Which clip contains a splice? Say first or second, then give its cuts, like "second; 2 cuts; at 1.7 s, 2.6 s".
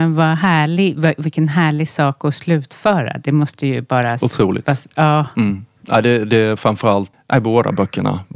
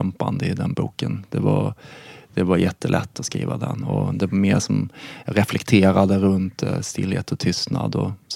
first; 1 cut; at 7.1 s